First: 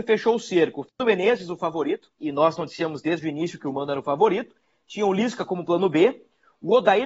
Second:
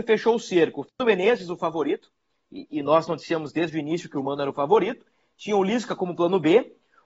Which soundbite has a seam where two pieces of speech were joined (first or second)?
first